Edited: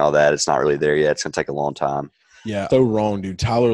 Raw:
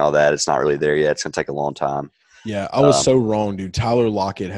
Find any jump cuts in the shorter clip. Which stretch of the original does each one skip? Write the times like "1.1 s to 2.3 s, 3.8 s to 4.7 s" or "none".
2.7 s to 3.0 s